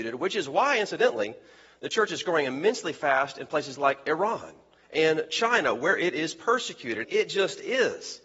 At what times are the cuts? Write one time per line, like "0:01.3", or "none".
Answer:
0:07.0